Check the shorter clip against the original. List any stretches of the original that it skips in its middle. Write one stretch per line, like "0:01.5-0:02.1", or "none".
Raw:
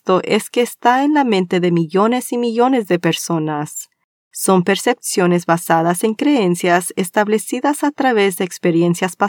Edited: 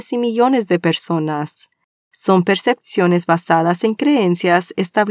none